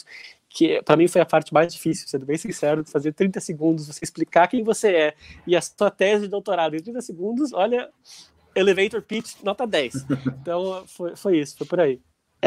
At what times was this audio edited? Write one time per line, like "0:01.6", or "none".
none